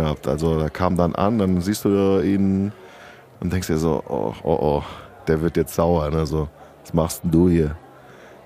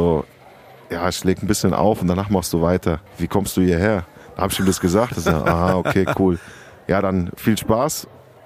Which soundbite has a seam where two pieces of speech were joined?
second; 1 cut; at 3.1 s

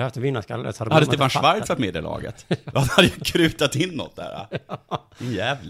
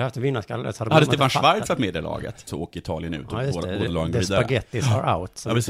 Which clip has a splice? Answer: second; 1 cut; at 2.5 s

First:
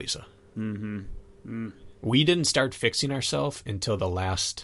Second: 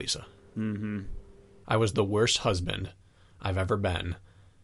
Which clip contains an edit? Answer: first; 1 cut; at 1.4 s

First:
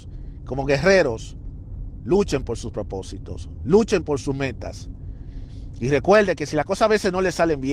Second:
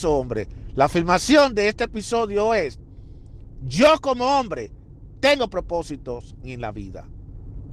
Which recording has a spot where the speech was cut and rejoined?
second; 1 cut; at 6.4 s

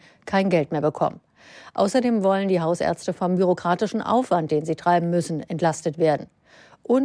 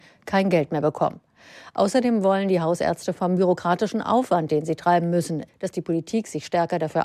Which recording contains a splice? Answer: second; 1 cut; at 5.5 s

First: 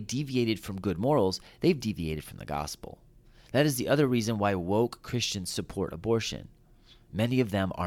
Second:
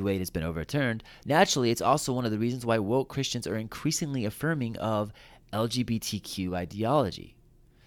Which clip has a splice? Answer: second; 1 cut; at 1.2 s

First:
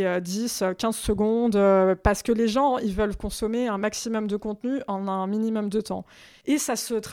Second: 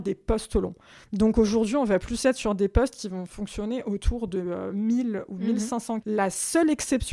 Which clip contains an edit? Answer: second; 1 cut; at 6.0 s

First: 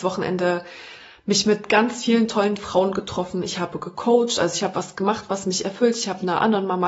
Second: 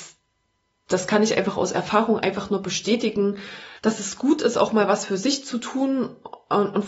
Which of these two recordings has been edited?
second; 1 cut; at 3.8 s

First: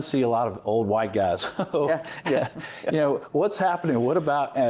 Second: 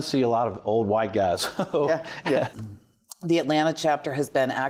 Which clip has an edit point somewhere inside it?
second; 1 cut; at 2.5 s

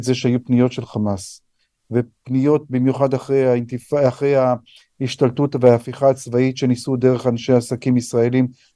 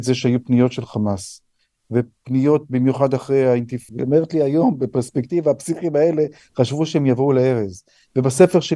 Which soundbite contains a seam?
second; 1 cut; at 3.9 s

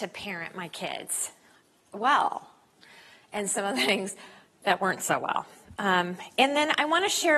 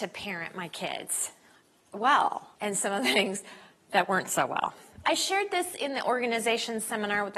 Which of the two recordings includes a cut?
second; 2 cuts; at 2.5 s, 5.0 s

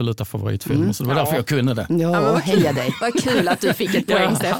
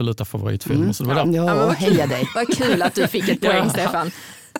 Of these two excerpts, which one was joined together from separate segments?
second; 1 cut; at 1.2 s

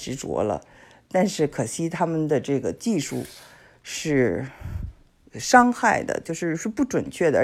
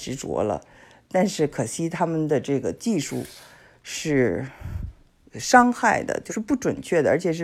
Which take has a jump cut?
second; 1 cut; at 6.3 s

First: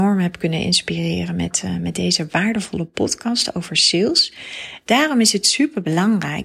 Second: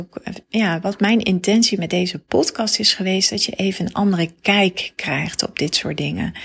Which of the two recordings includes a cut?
first; 1 cut; at 4.8 s

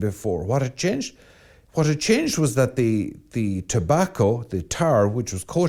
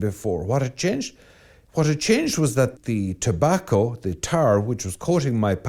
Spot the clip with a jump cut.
second; 1 cut; at 2.8 s

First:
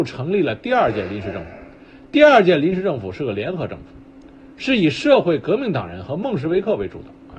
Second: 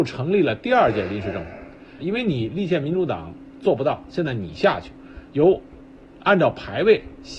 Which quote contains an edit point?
second; 2 cuts; at 2.0 s, 4.1 s

